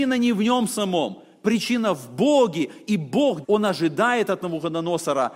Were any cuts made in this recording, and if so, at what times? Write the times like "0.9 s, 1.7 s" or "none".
3.4 s

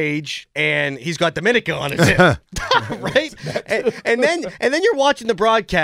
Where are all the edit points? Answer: none

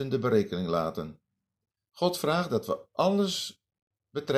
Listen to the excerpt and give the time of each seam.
none

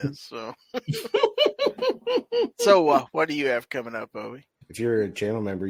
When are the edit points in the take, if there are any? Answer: 4.6 s

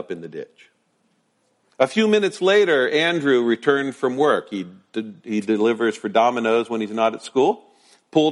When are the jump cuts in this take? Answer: 1.7 s

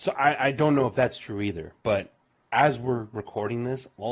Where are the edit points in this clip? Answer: none

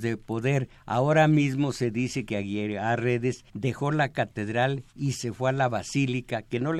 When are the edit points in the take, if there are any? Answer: 3.5 s

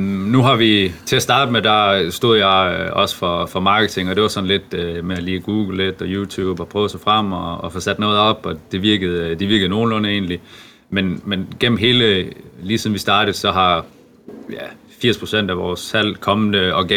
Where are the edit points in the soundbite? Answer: none

